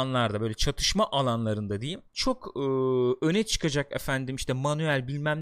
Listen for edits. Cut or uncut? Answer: cut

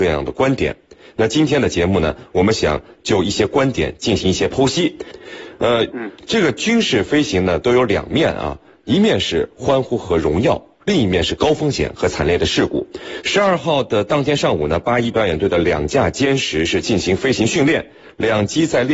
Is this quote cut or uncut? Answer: cut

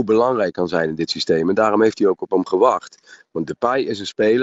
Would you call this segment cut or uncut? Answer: uncut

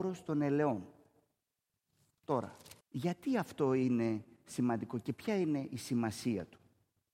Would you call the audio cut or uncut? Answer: cut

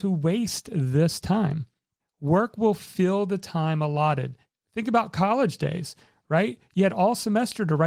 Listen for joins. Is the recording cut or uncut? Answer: cut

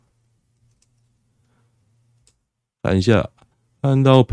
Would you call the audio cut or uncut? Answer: uncut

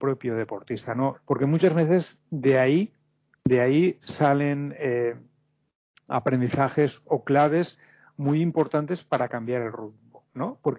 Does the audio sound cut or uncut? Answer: cut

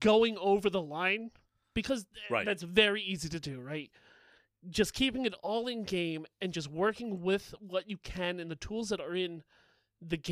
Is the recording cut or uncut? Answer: uncut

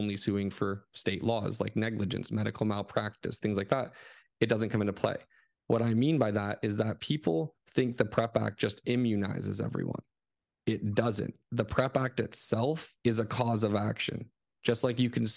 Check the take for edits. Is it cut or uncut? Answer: cut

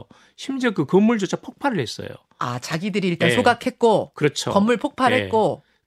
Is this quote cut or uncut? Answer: uncut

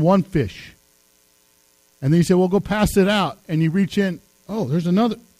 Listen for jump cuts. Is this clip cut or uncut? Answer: uncut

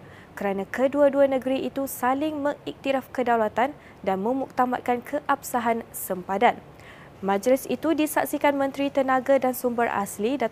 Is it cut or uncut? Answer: cut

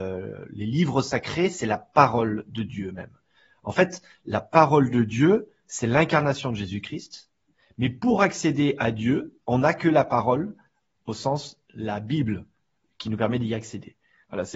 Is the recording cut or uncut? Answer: cut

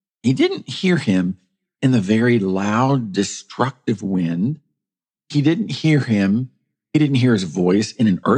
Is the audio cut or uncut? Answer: uncut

